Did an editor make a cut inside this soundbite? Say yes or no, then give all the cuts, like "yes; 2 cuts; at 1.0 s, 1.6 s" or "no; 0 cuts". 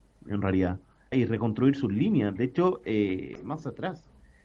yes; 2 cuts; at 1.1 s, 3.4 s